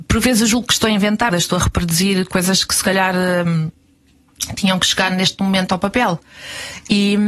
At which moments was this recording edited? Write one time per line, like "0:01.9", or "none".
0:01.3